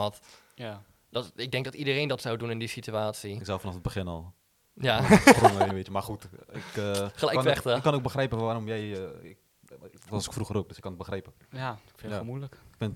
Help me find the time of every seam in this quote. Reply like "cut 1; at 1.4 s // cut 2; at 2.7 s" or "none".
cut 1; at 5.7 s